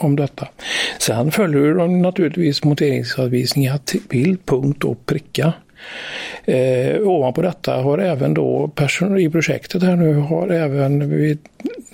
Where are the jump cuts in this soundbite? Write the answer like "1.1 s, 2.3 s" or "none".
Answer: none